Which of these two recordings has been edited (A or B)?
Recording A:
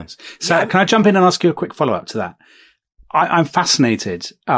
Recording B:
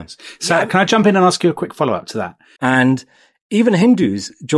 B